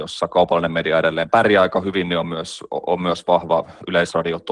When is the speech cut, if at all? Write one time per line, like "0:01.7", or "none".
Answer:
none